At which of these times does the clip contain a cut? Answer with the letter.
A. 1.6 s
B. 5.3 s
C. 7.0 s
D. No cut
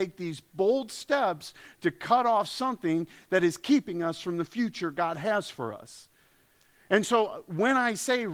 D